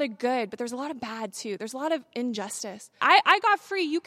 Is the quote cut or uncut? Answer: cut